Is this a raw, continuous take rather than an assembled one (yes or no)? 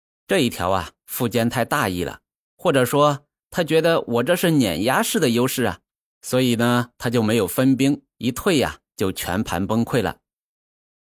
no